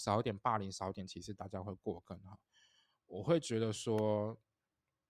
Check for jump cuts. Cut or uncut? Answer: uncut